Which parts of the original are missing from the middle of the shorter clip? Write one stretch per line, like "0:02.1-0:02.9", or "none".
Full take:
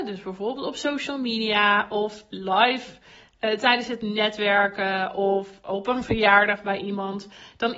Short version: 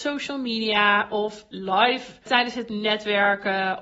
0:03.1-0:03.6